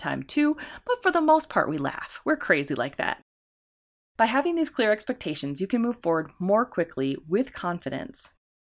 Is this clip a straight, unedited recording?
yes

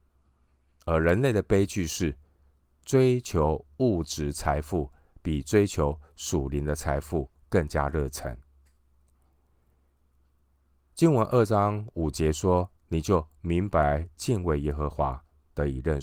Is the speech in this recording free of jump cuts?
yes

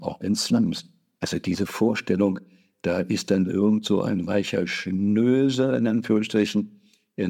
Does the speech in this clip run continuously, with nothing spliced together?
yes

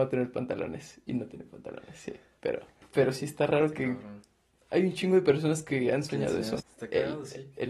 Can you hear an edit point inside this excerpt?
yes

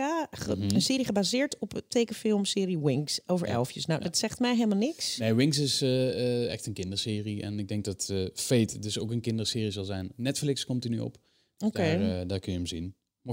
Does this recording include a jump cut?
no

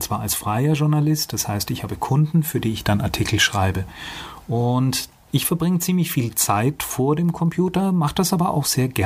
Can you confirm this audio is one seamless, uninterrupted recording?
yes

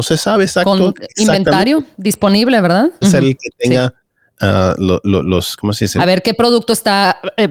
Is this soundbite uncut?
no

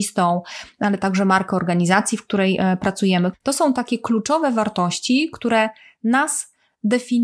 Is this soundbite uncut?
no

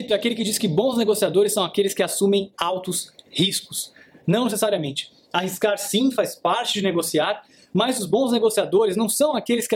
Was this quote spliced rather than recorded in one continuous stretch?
no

